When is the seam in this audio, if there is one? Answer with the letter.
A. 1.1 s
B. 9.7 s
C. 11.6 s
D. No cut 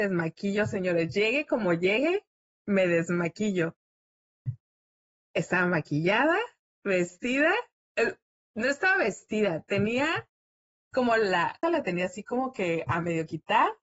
C